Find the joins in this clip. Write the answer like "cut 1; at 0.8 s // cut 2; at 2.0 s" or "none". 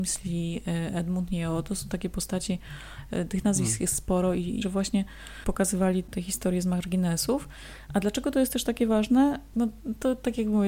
cut 1; at 4.6 s // cut 2; at 9.5 s